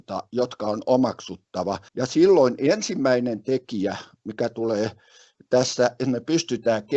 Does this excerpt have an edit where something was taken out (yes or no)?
yes